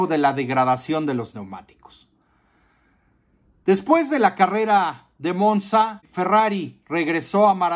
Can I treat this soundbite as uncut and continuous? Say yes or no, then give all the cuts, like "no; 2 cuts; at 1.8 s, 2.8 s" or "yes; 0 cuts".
yes; 0 cuts